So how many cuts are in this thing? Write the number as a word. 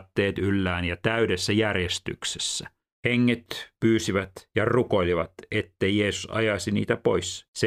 one